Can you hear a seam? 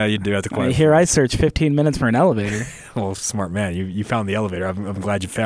no; 0 cuts

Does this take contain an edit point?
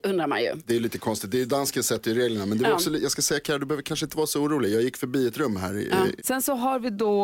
yes; 1 cut; at 6.2 s

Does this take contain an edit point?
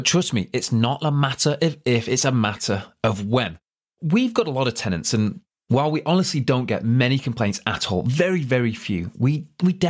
no; 0 cuts

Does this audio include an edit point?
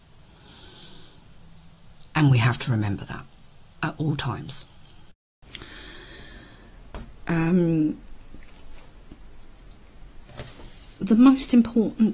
yes; 2 cuts; at 2.1 s, 7.2 s

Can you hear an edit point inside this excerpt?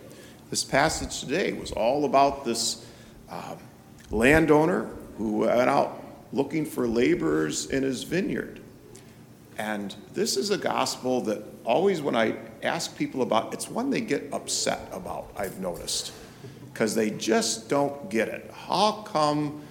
no; 0 cuts

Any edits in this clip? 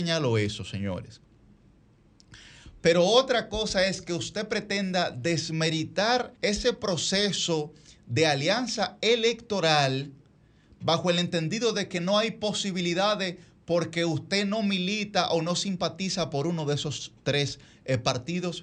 yes; 2 cuts; at 2.8 s, 6.4 s

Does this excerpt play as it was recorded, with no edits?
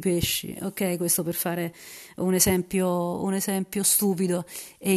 yes; 0 cuts

